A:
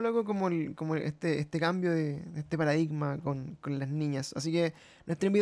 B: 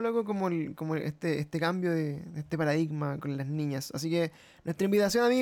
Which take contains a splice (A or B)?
B